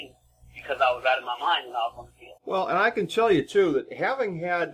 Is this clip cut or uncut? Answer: cut